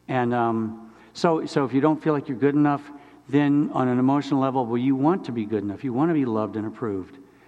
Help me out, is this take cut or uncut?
uncut